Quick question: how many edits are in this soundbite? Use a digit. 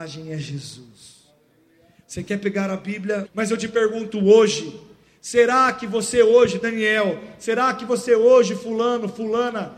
1